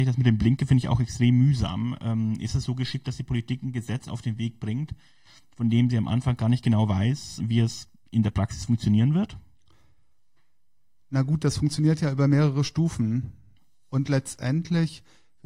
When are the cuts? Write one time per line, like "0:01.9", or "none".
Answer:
0:07.4